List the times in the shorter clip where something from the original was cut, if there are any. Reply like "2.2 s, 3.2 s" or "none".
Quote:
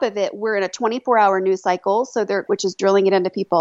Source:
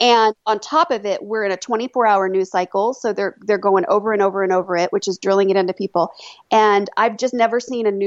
2.5 s

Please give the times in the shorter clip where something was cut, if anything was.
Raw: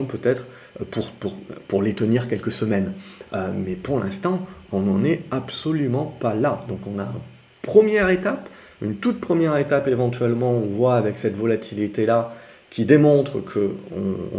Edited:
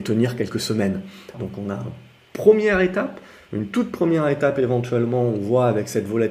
1.3 s

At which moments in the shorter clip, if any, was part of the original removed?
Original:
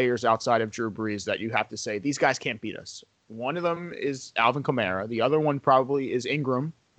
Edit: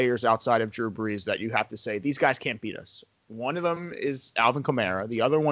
none

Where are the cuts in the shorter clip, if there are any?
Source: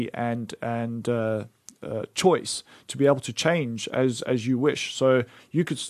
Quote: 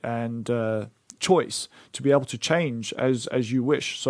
1.2 s

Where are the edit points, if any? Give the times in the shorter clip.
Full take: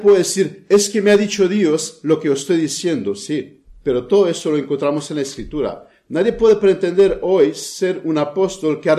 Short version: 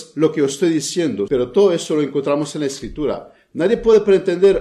1.3 s

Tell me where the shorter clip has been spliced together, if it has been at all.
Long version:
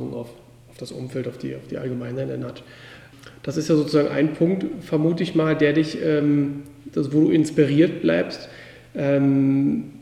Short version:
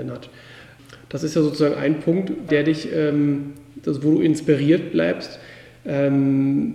2.5 s

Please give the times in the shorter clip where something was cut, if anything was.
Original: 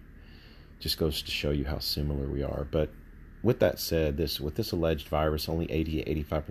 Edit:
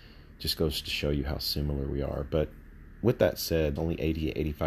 3.8 s

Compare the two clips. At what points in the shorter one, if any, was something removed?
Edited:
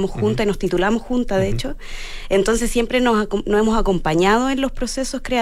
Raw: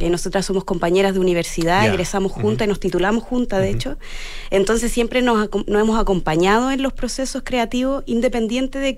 none

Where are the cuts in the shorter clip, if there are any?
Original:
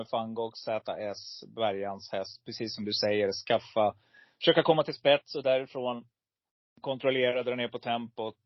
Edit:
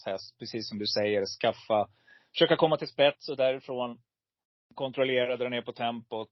none

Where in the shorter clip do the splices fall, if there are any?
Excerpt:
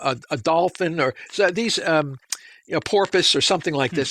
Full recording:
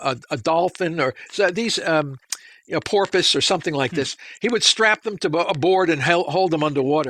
none

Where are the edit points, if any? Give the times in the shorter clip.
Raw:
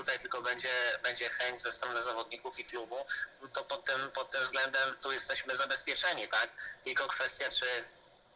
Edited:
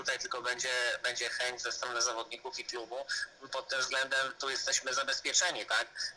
3.5 s

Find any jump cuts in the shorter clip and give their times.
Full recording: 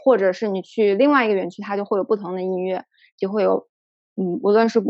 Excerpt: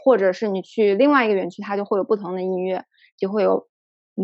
none

